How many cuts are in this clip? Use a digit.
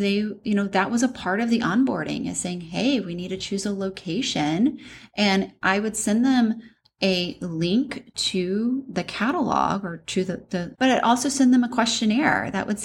1